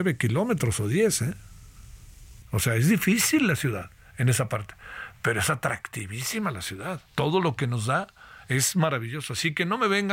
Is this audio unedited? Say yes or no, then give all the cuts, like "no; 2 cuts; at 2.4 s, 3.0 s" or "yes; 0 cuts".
no; 2 cuts; at 2.4 s, 7.1 s